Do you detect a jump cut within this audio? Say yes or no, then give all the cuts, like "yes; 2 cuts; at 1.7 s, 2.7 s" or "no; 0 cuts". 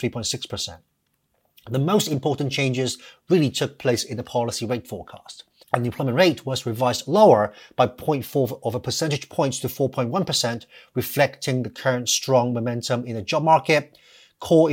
yes; 1 cut; at 5.6 s